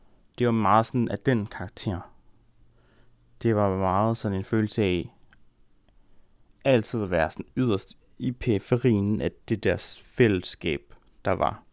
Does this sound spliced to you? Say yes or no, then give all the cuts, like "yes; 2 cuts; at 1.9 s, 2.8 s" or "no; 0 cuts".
no; 0 cuts